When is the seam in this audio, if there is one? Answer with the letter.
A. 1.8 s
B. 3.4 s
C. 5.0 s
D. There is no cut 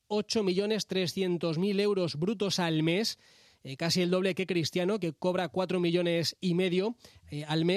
D